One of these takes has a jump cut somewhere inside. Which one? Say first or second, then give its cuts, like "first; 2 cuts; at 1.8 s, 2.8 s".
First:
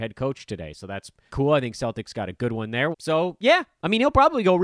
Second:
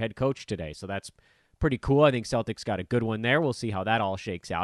first; 2 cuts; at 1.3 s, 2.9 s